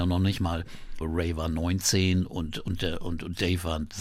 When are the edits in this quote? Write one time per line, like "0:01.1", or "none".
0:01.0